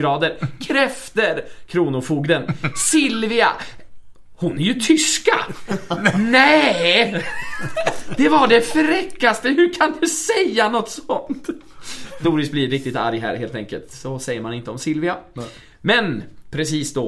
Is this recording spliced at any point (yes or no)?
no